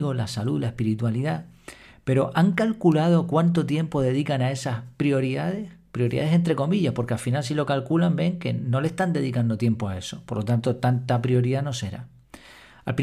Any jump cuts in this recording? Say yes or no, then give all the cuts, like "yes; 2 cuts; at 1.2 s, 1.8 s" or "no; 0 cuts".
no; 0 cuts